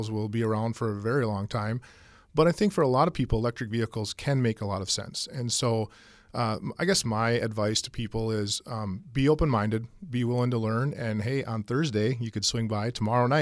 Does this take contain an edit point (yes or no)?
no